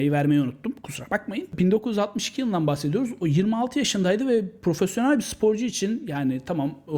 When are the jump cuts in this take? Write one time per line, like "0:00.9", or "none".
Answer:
none